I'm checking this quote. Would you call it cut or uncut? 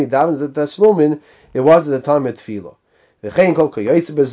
uncut